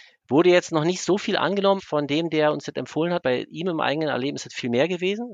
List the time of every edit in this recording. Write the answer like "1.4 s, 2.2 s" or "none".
1.8 s, 3.2 s